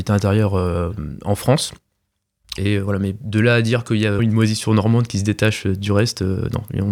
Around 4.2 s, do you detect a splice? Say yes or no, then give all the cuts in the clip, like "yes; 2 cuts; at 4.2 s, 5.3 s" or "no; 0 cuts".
yes; 2 cuts; at 2.6 s, 4.2 s